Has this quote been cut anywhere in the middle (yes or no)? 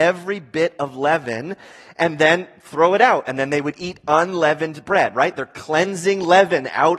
no